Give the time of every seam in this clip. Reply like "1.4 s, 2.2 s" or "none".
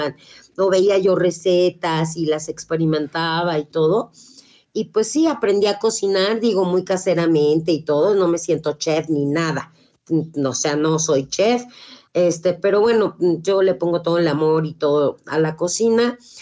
none